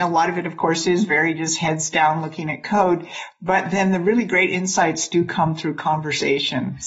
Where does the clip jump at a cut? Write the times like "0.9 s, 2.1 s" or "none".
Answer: none